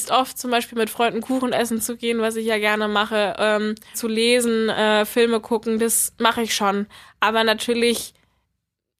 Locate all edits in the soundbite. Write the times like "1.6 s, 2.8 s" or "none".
3.9 s